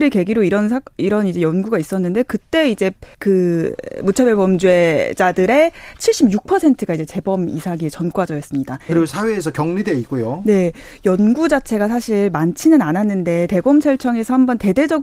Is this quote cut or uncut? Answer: cut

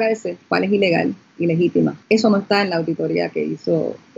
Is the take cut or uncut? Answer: cut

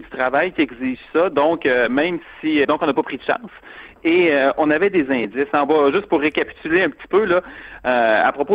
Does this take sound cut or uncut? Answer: cut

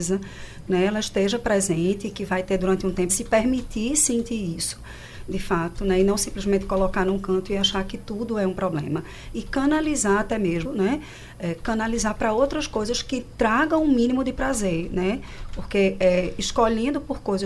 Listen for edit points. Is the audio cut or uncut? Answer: cut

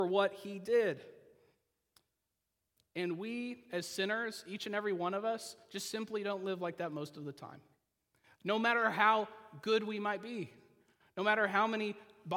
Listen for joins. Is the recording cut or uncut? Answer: uncut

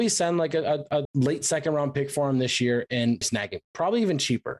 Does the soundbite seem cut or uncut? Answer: cut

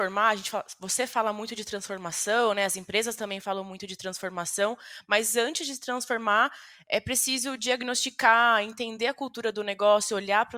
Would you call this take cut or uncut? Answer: uncut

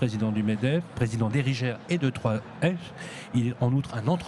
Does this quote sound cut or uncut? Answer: uncut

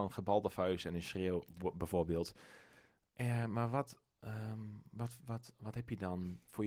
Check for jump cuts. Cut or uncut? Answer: uncut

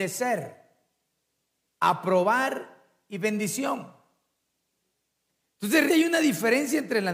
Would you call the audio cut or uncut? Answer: cut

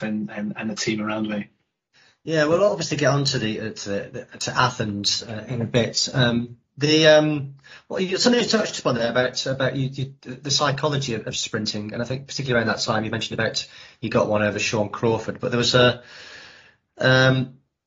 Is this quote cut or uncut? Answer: uncut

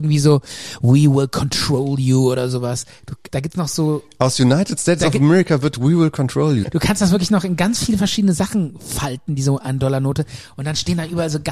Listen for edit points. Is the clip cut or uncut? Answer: cut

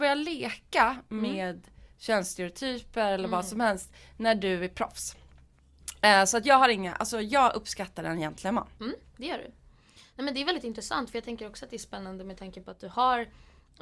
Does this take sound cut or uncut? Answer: uncut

